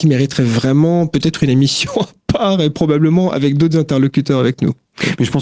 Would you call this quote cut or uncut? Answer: uncut